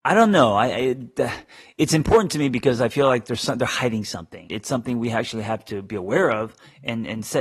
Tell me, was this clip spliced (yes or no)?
yes